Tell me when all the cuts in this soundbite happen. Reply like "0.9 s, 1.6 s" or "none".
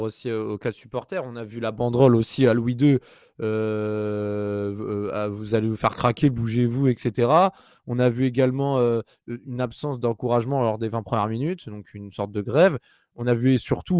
none

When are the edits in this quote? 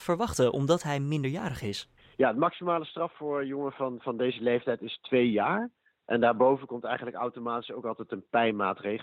3.1 s

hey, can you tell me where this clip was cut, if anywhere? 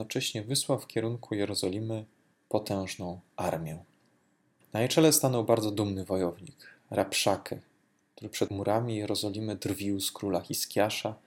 none

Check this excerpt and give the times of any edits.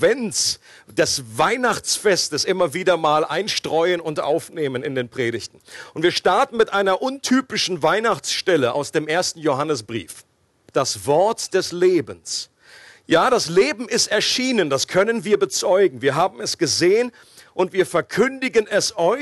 10.7 s

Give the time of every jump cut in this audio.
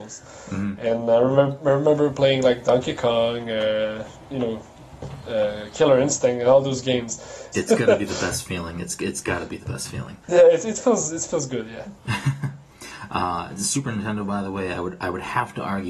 7.5 s, 10.2 s

